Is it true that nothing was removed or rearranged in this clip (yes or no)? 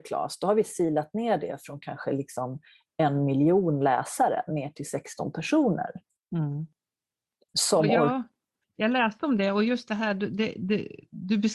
yes